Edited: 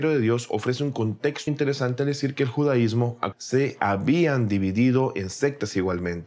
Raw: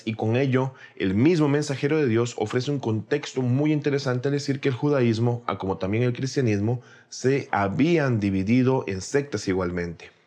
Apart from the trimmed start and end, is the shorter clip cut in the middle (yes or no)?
yes